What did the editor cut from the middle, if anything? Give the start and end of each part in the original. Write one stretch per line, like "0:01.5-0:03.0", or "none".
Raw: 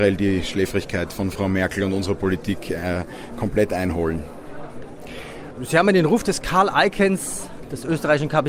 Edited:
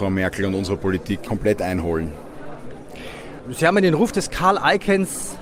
0:02.6-0:03.4